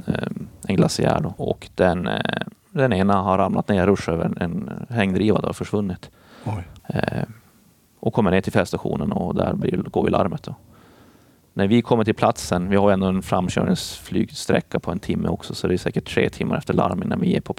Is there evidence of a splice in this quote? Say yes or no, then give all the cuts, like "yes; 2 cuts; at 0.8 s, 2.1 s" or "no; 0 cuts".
yes; 2 cuts; at 1.4 s, 6.8 s